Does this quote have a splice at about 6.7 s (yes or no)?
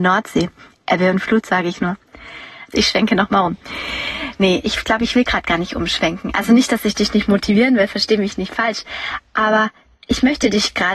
no